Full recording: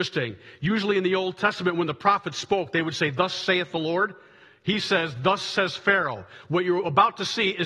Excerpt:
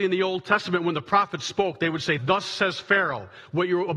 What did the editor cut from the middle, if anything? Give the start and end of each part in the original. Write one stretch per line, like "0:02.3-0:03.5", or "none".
0:03.1-0:05.1